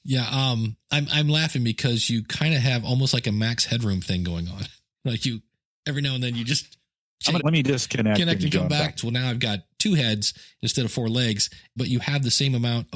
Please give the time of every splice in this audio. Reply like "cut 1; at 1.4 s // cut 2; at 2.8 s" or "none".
cut 1; at 7.4 s // cut 2; at 9.0 s // cut 3; at 11.8 s